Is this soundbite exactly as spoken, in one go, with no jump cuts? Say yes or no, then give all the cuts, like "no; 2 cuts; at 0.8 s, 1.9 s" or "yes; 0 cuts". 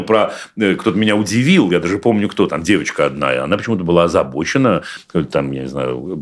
yes; 0 cuts